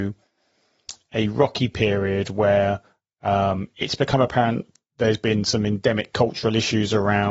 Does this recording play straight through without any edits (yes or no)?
yes